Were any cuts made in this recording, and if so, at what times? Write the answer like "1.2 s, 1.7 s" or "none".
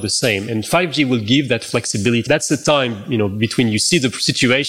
2.3 s